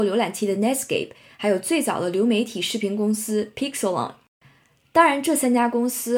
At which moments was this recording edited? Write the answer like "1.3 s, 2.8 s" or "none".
1.3 s